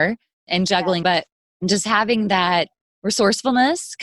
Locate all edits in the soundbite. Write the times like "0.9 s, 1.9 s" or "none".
1.0 s